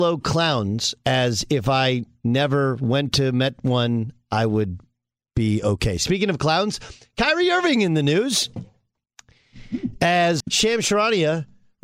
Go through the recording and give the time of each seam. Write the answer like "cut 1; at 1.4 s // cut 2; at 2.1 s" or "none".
cut 1; at 10.4 s